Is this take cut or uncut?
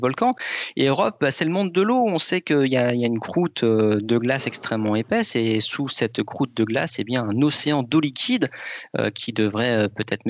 uncut